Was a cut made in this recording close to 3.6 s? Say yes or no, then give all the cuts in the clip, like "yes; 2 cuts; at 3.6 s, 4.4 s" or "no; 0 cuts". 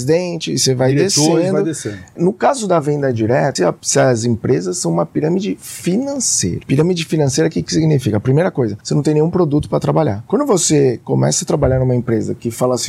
yes; 1 cut; at 3.6 s